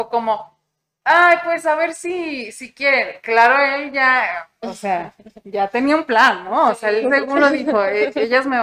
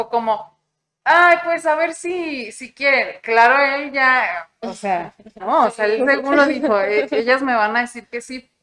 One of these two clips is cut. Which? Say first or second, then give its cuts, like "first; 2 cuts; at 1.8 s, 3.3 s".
second; 1 cut; at 5.4 s